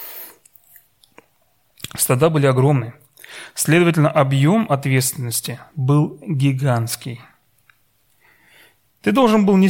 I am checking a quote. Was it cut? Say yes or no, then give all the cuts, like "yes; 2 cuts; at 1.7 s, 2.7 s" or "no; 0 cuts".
no; 0 cuts